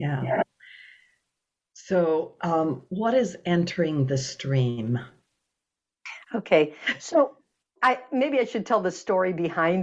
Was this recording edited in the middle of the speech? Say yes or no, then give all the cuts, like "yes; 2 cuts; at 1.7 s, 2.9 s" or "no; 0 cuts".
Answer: yes; 1 cut; at 7.8 s